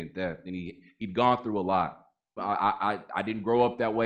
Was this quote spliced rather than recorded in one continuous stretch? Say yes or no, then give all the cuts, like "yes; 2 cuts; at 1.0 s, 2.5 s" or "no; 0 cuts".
yes; 1 cut; at 2.4 s